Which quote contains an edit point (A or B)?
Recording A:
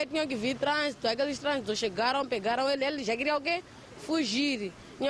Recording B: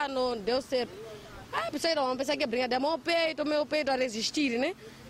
B